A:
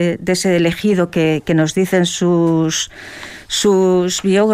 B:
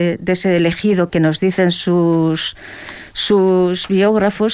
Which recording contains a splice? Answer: B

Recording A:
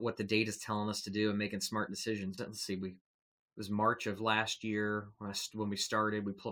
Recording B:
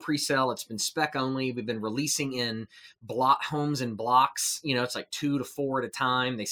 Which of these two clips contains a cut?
A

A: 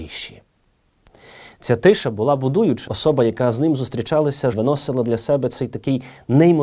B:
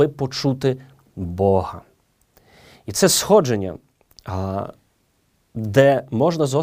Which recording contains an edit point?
A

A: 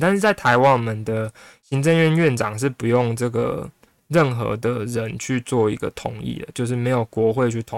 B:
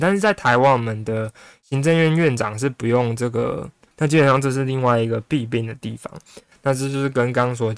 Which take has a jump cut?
B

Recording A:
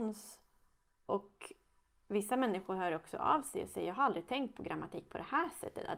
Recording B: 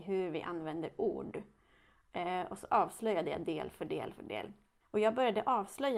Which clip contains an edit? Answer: B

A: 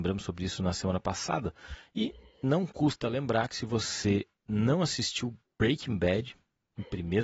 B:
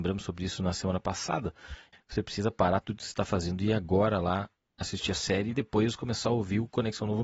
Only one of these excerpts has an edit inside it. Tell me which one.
B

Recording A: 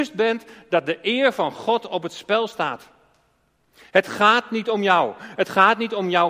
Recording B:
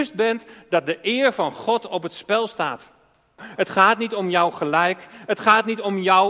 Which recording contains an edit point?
B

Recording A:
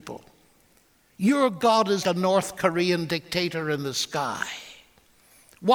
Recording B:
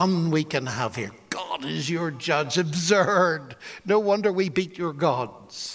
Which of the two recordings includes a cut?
A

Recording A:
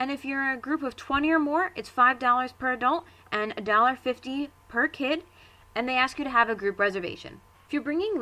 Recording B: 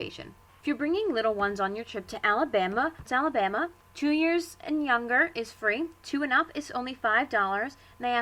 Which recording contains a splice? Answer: B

